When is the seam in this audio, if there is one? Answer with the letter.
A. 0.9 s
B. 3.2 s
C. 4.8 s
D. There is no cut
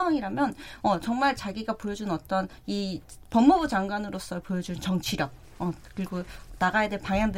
B